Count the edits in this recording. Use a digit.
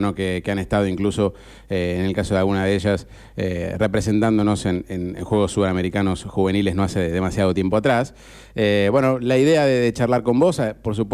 0